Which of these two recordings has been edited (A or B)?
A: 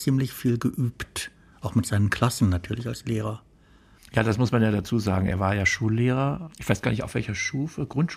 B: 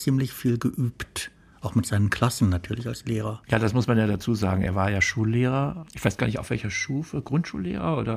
B